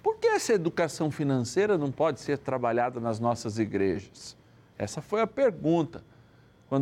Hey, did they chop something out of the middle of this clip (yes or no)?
no